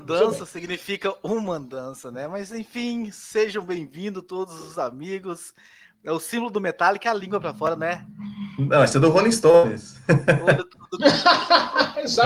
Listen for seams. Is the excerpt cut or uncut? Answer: uncut